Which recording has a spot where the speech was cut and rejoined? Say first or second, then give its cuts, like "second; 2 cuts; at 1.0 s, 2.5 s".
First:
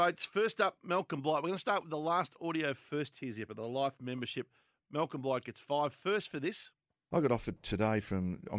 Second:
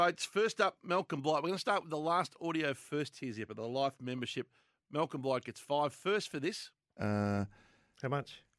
second; 1 cut; at 7.0 s